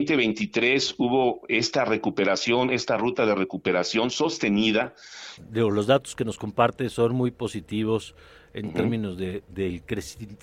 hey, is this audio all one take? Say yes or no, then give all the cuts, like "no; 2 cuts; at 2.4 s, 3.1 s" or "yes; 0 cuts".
no; 1 cut; at 5.4 s